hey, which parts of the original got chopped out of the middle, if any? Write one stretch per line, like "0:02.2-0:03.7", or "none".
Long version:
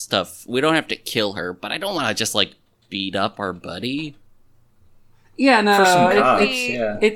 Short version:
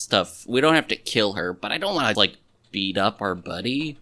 0:02.2-0:02.3